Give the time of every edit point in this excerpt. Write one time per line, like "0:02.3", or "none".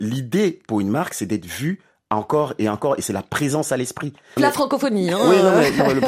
0:04.4